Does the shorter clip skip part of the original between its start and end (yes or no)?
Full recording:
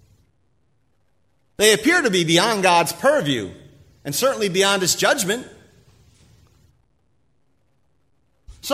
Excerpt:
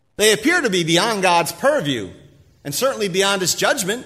no